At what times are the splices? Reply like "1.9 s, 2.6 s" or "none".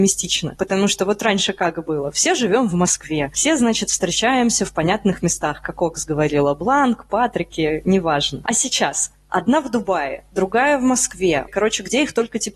11.5 s